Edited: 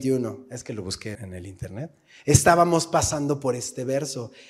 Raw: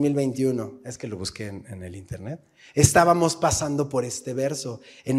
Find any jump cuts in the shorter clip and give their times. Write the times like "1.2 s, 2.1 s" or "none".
1.1 s